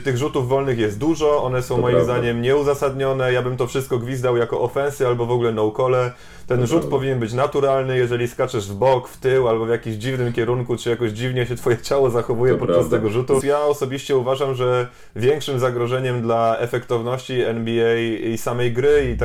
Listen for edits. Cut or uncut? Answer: cut